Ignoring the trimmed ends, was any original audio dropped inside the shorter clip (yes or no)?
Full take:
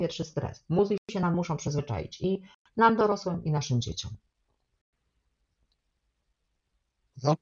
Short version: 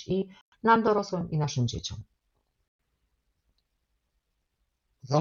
no